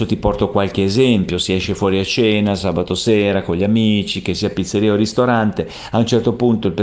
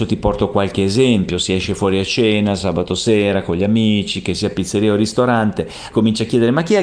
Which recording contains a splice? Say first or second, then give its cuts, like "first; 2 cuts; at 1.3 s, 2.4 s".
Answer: second; 1 cut; at 5.9 s